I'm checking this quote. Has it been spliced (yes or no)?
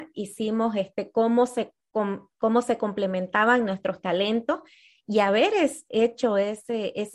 no